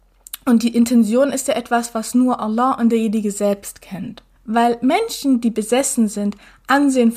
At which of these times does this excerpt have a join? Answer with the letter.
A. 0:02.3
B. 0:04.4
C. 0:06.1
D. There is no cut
B